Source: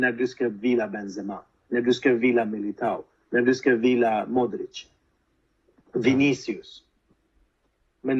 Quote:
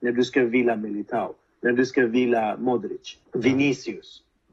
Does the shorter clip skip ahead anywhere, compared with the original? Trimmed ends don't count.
yes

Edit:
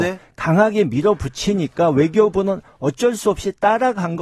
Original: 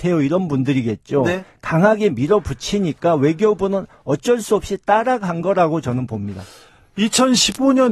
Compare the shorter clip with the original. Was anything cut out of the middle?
no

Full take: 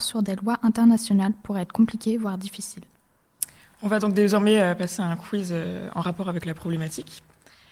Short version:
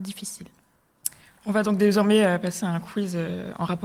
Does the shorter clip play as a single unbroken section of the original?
yes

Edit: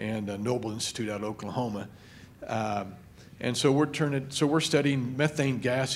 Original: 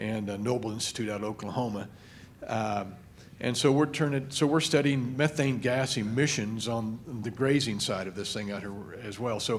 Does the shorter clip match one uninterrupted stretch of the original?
yes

